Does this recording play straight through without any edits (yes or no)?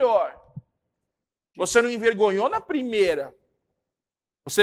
no